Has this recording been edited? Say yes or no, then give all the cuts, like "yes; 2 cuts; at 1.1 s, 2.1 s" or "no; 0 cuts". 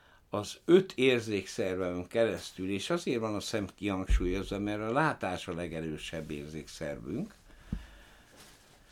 no; 0 cuts